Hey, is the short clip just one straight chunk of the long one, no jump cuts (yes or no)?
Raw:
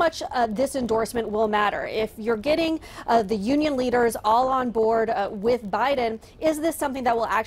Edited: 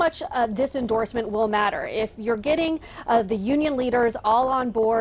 yes